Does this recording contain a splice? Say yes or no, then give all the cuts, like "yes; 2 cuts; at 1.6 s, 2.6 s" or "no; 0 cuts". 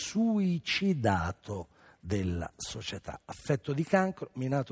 no; 0 cuts